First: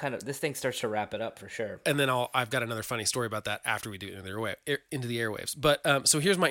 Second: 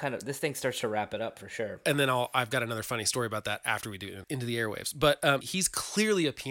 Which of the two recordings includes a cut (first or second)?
second